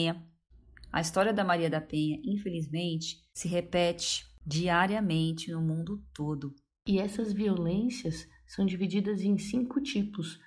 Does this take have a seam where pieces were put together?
no; 0 cuts

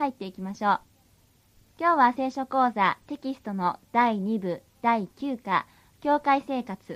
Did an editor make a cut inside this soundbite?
no; 0 cuts

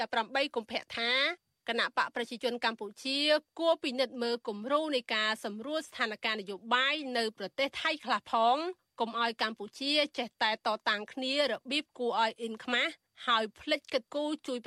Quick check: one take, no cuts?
yes; 0 cuts

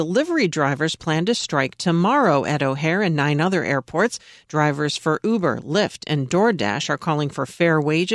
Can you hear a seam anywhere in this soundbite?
no; 0 cuts

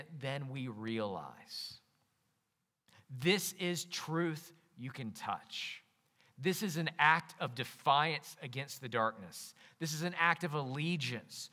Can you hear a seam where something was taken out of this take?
no; 0 cuts

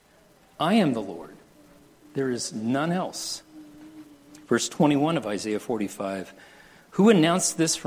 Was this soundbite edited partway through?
no; 0 cuts

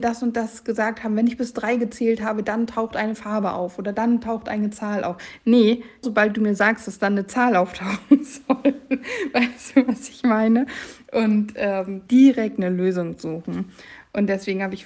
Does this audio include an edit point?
yes; 2 cuts; at 6.0 s, 12.1 s

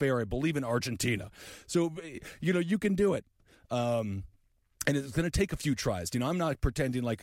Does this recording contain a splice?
no; 0 cuts

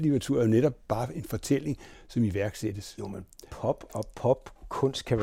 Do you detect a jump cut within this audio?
no; 0 cuts

